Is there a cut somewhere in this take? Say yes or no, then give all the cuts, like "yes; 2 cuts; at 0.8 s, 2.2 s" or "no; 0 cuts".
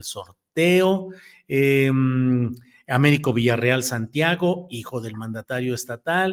no; 0 cuts